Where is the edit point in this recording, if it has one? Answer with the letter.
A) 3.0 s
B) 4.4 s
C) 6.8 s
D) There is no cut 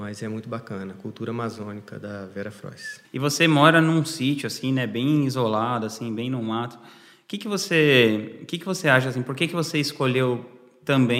A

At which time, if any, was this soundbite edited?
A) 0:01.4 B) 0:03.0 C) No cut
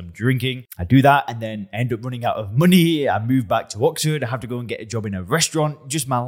C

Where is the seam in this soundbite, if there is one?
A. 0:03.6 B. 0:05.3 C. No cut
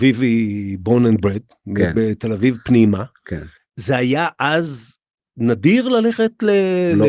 A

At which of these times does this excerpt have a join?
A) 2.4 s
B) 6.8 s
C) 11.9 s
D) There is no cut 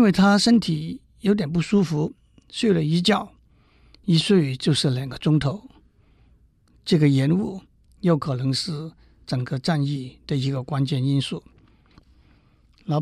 C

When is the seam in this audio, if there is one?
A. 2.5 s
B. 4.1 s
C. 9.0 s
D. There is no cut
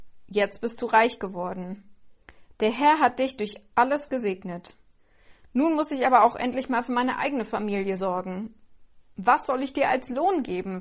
B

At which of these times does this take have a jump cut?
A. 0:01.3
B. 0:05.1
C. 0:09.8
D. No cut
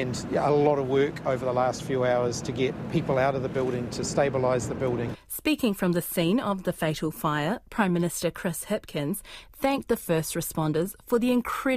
B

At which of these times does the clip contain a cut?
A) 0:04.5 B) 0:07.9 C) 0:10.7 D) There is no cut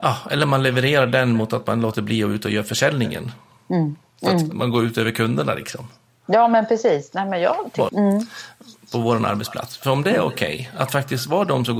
B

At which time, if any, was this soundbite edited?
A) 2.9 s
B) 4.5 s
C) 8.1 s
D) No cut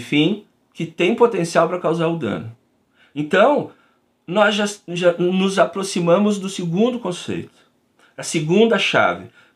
D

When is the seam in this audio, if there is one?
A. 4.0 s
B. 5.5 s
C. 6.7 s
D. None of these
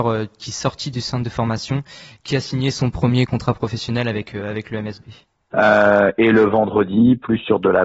B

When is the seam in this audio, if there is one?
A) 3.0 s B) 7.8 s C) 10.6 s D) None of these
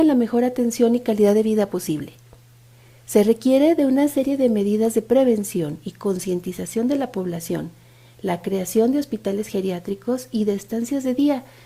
D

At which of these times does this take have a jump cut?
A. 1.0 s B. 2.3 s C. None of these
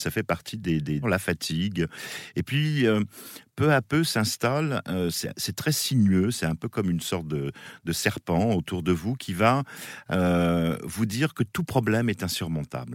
A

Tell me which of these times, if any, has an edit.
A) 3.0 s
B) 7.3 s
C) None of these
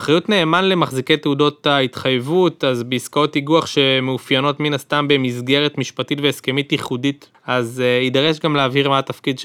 B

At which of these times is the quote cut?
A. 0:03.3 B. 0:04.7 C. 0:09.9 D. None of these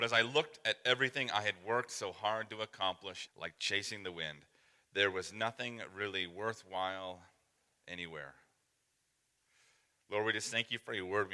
A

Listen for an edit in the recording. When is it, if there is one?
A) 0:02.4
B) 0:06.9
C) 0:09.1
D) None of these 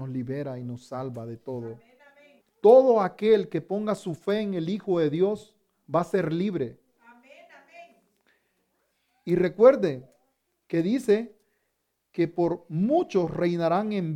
A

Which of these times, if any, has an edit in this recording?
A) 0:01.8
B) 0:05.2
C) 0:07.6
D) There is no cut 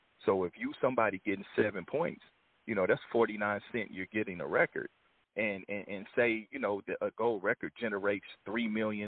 B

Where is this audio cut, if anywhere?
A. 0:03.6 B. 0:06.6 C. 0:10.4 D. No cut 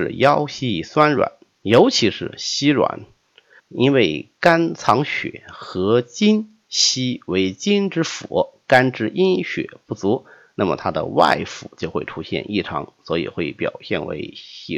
A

